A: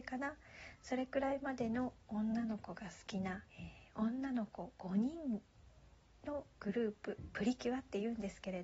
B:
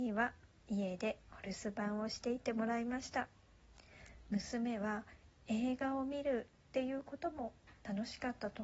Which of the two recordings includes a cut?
A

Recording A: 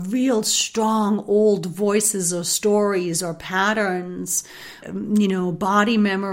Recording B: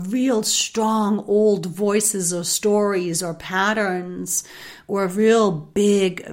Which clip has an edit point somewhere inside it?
A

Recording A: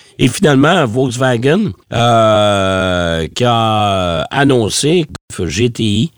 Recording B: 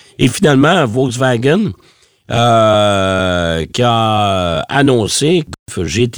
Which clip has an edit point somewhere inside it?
A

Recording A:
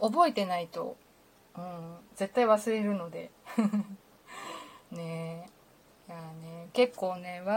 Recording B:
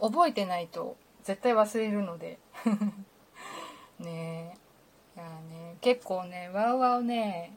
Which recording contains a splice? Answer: B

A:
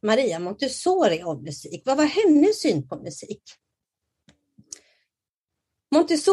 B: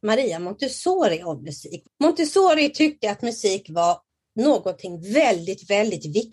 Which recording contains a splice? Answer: B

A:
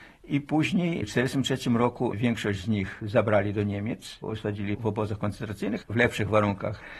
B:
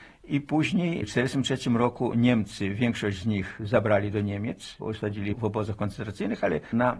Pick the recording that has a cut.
A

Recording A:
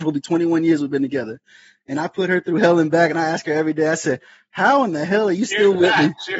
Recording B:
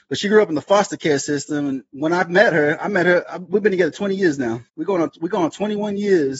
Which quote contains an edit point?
B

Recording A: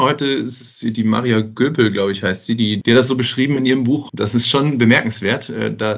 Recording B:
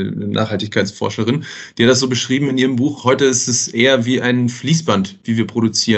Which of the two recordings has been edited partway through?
A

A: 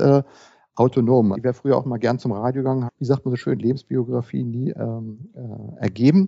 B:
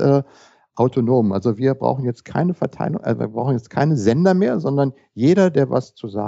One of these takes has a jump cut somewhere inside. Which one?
A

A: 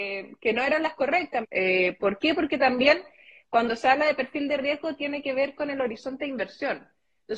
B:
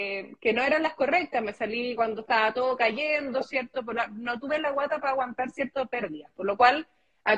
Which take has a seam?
A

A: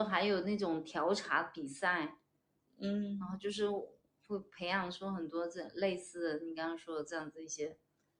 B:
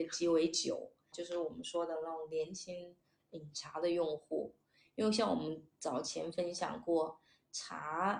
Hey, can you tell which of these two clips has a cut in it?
B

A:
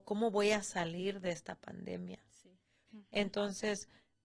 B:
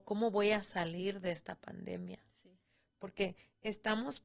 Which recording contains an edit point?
A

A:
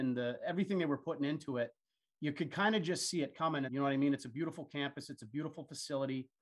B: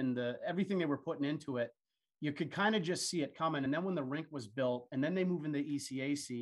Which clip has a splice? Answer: A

